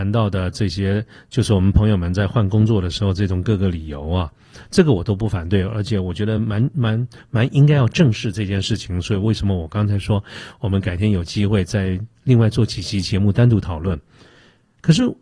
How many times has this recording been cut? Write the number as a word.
zero